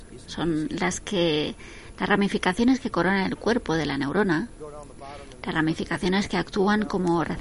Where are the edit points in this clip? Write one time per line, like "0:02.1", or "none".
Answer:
none